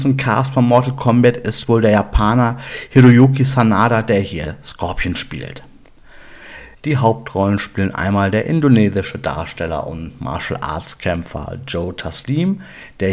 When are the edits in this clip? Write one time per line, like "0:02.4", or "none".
0:06.7